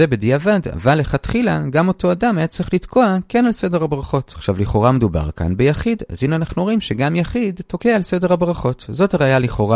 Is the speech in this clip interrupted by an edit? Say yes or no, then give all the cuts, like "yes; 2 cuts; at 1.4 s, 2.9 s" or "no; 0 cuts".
no; 0 cuts